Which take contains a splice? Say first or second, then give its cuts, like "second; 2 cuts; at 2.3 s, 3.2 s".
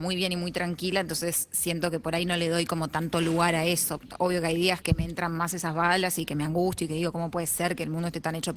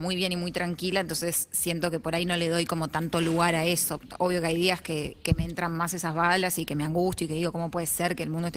first; 1 cut; at 4.8 s